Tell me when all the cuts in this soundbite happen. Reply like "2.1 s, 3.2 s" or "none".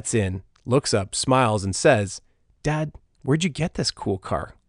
none